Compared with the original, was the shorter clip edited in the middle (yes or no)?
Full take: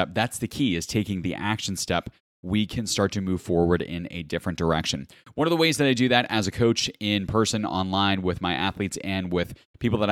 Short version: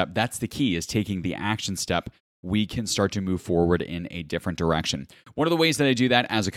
no